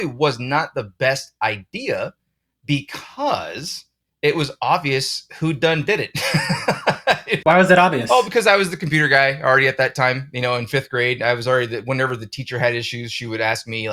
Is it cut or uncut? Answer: uncut